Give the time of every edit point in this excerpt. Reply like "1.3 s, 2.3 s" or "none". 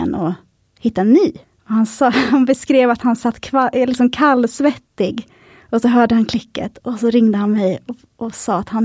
1.4 s